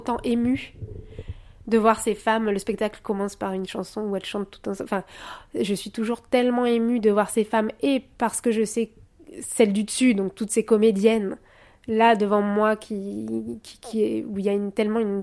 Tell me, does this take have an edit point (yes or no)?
no